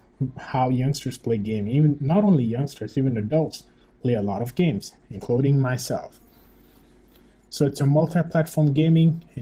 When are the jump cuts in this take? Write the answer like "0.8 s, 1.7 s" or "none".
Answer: none